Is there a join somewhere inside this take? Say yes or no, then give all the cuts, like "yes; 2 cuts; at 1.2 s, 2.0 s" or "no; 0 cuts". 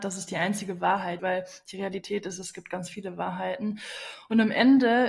yes; 1 cut; at 1.2 s